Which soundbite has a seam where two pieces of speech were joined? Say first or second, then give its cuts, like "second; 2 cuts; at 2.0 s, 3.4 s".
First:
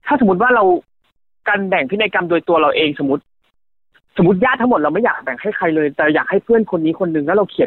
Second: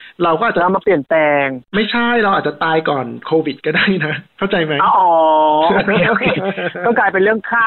second; 1 cut; at 4.3 s